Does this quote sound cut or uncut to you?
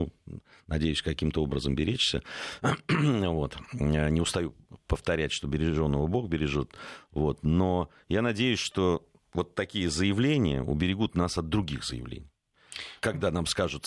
uncut